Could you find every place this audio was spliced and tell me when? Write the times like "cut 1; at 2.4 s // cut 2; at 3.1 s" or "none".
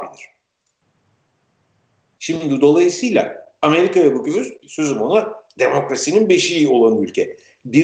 cut 1; at 2.2 s // cut 2; at 4.6 s

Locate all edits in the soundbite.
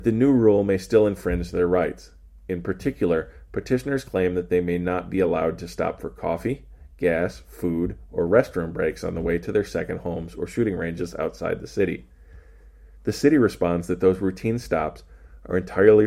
none

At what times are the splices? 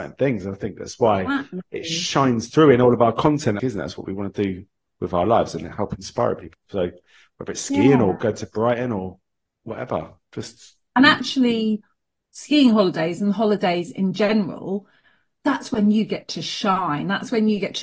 cut 1; at 3.6 s

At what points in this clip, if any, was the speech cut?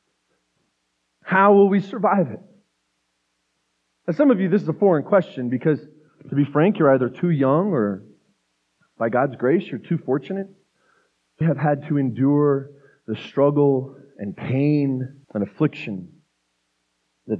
cut 1; at 11.4 s // cut 2; at 15.2 s

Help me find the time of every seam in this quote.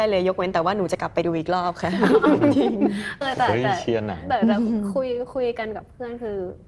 cut 1; at 3.2 s

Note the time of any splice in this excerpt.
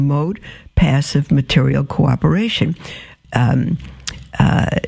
cut 1; at 3.2 s

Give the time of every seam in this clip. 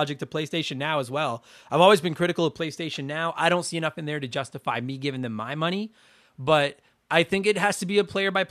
none

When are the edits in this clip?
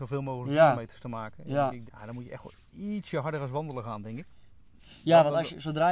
cut 1; at 1.9 s

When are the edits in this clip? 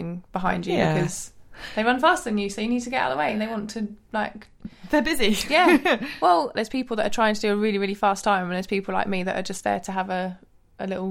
cut 1; at 6.5 s

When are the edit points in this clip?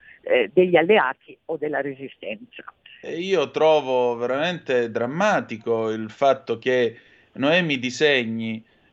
cut 1; at 3.0 s

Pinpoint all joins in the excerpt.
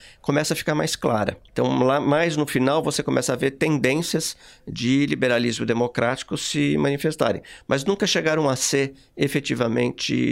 none

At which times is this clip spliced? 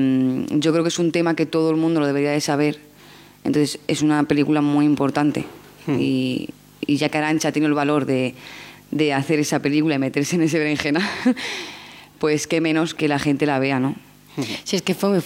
cut 1; at 13.0 s

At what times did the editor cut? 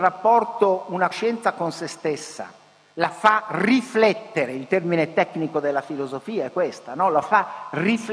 none

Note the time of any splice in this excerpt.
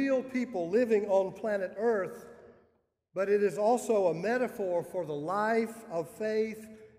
none

